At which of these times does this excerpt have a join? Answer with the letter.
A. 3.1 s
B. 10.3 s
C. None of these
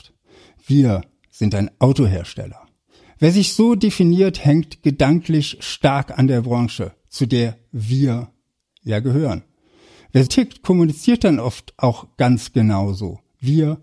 B